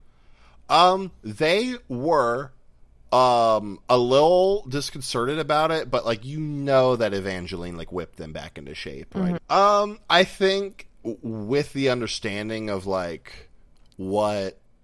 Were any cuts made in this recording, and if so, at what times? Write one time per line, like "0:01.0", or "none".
0:09.4